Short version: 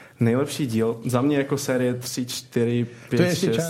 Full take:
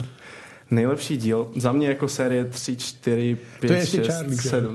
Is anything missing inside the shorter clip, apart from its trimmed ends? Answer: no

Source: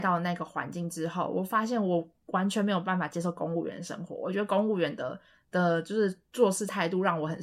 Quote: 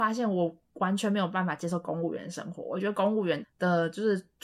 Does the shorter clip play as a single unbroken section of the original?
no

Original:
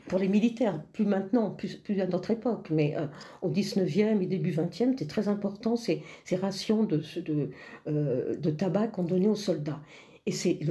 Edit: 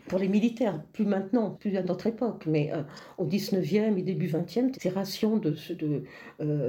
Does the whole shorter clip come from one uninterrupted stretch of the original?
no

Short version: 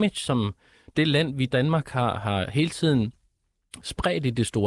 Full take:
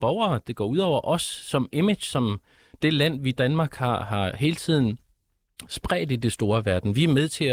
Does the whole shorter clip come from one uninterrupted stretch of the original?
yes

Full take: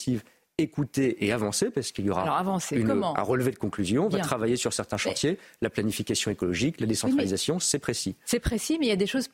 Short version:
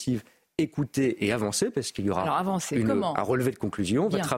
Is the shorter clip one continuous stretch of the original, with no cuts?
yes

